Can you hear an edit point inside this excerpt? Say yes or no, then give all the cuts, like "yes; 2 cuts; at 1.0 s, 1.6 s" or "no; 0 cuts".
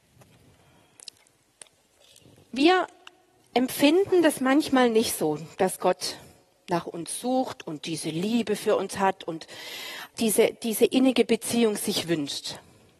yes; 1 cut; at 10.1 s